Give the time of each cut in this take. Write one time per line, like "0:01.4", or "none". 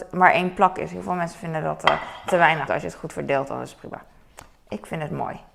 0:02.7